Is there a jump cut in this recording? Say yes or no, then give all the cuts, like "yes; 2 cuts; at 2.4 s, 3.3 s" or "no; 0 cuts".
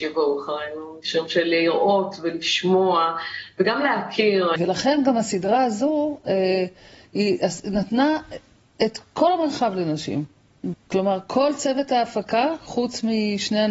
yes; 2 cuts; at 4.6 s, 10.7 s